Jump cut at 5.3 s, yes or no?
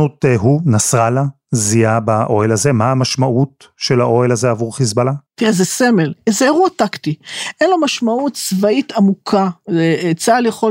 yes